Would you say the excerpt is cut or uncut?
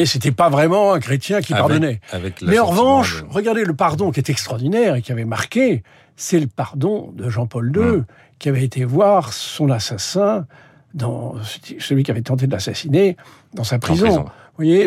uncut